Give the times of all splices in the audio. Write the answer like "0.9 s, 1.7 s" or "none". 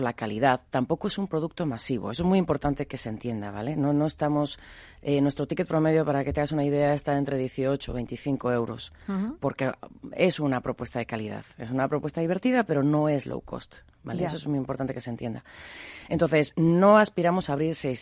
none